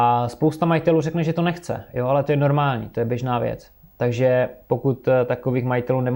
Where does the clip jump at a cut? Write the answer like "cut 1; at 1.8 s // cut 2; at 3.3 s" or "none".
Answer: none